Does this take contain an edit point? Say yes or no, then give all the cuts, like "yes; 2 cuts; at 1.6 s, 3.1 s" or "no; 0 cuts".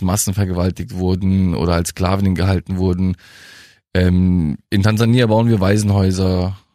no; 0 cuts